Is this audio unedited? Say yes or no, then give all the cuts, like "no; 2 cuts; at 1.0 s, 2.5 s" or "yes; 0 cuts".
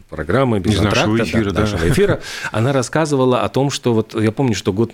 yes; 0 cuts